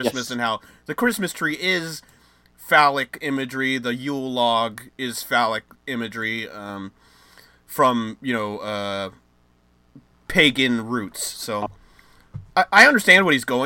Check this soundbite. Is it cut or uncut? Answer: uncut